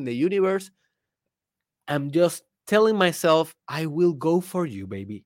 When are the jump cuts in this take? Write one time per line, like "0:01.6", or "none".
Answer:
none

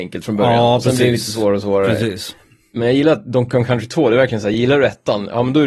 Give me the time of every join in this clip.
none

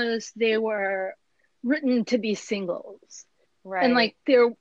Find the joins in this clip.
none

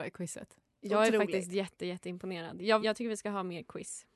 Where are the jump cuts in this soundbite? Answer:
0:02.8

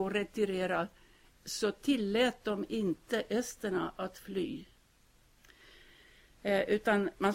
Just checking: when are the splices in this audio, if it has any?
none

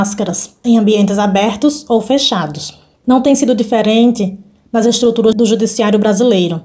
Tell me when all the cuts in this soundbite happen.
none

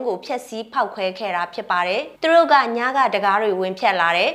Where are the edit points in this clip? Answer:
0:02.2

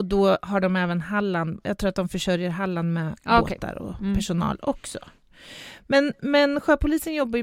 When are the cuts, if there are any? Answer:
none

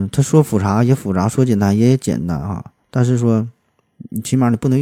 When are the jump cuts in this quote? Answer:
none

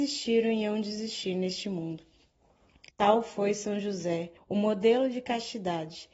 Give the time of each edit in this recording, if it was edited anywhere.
0:02.9
0:04.4

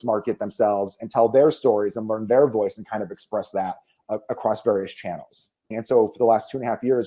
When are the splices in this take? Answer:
0:05.7

